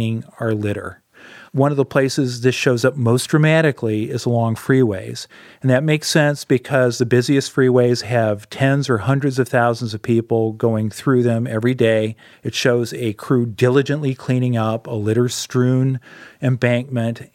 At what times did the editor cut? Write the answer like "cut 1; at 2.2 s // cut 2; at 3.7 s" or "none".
cut 1; at 12.3 s